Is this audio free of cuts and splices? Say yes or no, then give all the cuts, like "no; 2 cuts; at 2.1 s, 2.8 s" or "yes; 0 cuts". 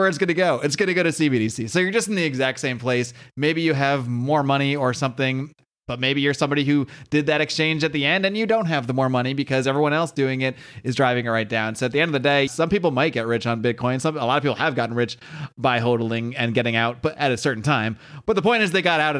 no; 1 cut; at 12.5 s